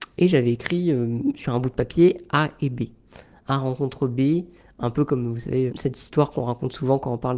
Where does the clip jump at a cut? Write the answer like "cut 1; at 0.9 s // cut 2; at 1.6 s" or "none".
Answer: cut 1; at 5.7 s